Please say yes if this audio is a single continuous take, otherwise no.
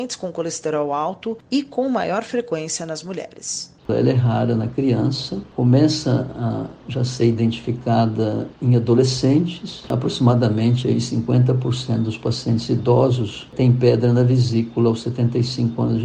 no